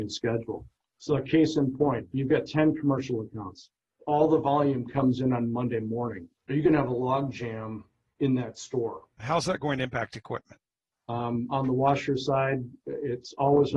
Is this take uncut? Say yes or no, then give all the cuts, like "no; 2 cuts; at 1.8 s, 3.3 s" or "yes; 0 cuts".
no; 3 cuts; at 6.4 s, 9.2 s, 10.9 s